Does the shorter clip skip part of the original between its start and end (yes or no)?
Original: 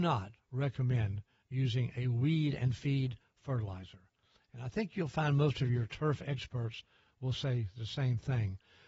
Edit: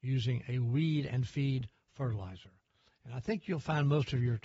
no